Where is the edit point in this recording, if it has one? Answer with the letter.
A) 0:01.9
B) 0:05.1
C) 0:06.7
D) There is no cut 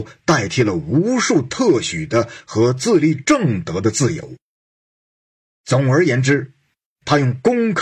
D